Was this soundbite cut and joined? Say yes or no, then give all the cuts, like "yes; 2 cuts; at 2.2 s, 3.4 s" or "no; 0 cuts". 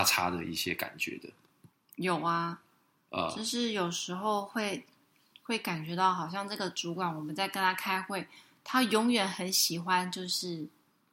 no; 0 cuts